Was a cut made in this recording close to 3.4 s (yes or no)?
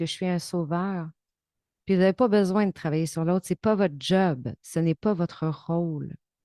no